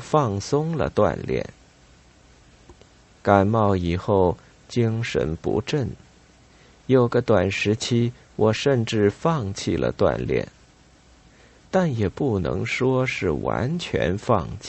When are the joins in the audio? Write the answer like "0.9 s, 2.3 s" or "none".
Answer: none